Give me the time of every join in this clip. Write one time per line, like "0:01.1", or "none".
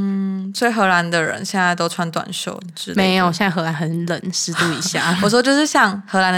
none